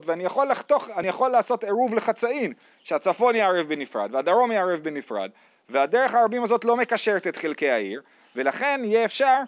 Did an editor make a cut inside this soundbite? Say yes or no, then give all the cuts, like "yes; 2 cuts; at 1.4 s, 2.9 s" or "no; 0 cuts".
no; 0 cuts